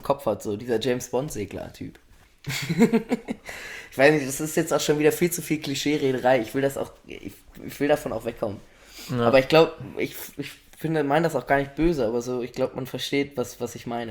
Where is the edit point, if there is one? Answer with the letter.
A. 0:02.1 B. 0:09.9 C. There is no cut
C